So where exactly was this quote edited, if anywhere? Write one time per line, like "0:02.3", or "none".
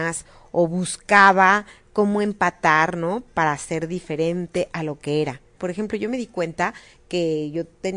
0:05.6